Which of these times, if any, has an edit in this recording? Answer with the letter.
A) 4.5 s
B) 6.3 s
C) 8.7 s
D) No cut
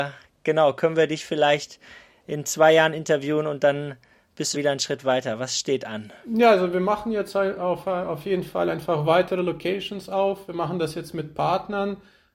A